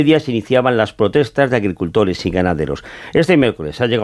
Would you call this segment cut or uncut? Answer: uncut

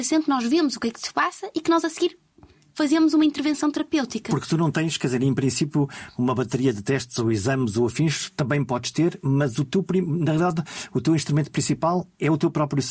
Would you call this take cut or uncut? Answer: uncut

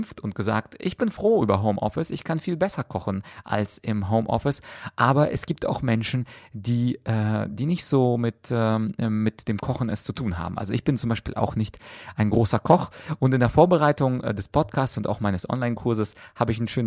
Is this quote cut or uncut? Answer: uncut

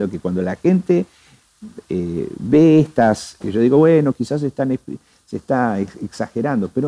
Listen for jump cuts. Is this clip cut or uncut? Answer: cut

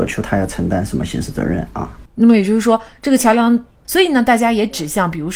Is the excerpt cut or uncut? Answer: cut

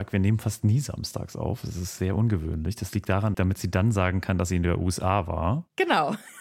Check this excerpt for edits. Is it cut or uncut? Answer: cut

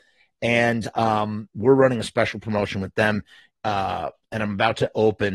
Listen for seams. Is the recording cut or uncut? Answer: cut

